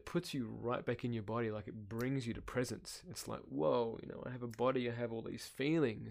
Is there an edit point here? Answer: no; 0 cuts

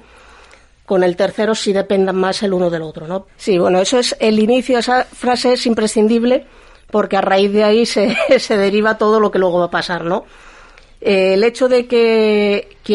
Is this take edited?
yes; 1 cut; at 3.3 s

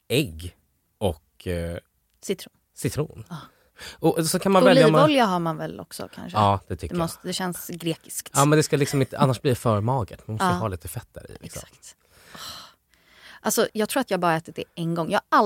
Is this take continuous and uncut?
no; 1 cut; at 13.7 s

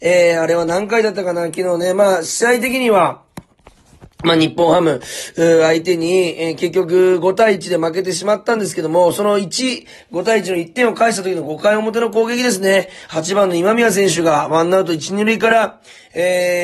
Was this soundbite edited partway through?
no; 0 cuts

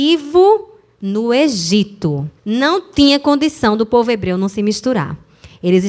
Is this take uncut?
no; 1 cut; at 2.4 s

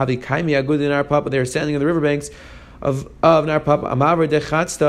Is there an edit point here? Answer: no; 0 cuts

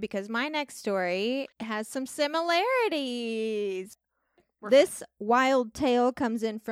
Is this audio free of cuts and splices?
no; 1 cut; at 1.5 s

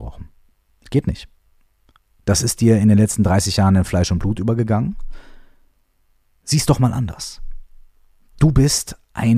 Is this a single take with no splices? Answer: yes; 0 cuts

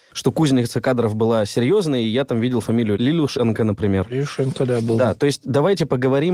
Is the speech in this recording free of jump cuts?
yes; 0 cuts

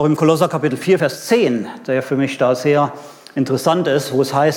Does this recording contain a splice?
no; 0 cuts

